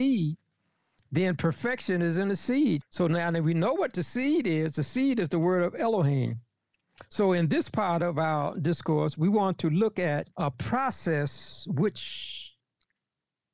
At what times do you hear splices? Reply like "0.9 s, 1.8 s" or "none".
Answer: 2.8 s, 10.3 s